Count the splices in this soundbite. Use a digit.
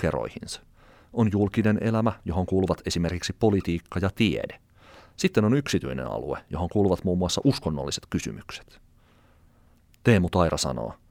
0